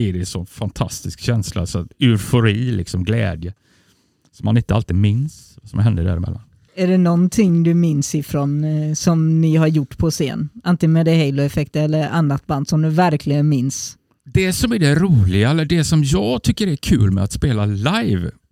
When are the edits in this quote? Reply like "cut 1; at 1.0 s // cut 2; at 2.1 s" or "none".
none

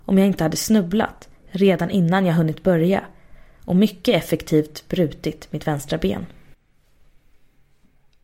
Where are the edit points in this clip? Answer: none

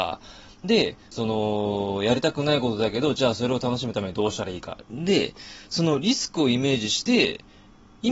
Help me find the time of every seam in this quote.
cut 1; at 1.1 s // cut 2; at 4.8 s

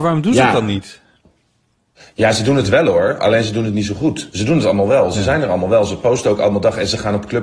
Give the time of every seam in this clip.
none

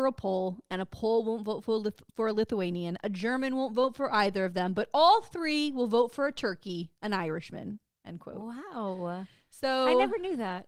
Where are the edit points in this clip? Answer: none

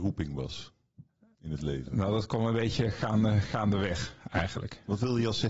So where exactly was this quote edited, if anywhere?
none

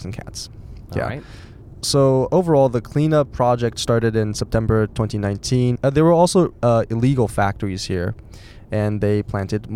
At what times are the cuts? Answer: cut 1; at 5.8 s

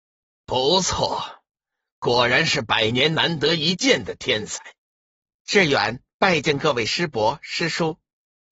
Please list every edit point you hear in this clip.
cut 1; at 4.9 s

